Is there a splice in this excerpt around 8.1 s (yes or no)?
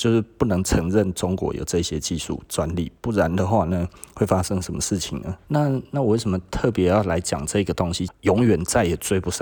yes